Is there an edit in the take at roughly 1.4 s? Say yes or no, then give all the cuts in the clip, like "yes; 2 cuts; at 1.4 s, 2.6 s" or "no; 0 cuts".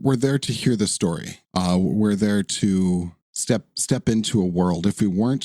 yes; 2 cuts; at 1.4 s, 3.2 s